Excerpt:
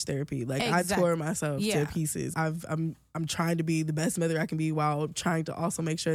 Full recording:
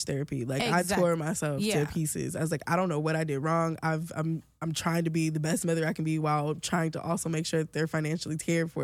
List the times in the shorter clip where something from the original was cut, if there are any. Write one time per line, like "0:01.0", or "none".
0:02.3